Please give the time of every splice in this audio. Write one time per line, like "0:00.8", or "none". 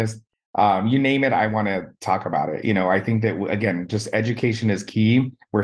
none